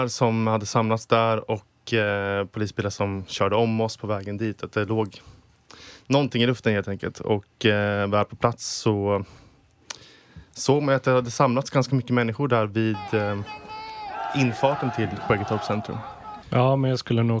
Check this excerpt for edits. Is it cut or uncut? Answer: cut